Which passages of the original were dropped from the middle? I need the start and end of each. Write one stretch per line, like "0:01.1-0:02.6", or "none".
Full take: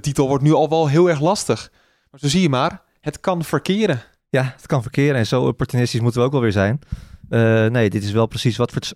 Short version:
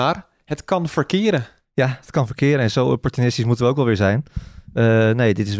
none